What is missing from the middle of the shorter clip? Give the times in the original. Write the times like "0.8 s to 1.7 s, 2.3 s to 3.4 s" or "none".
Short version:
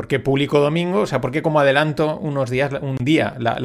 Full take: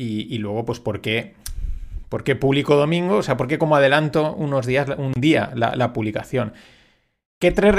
none